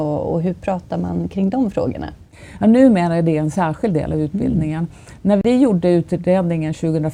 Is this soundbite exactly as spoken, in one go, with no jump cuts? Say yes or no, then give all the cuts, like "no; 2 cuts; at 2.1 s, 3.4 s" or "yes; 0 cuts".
yes; 0 cuts